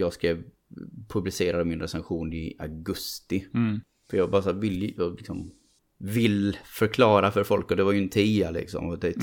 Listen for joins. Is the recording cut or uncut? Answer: uncut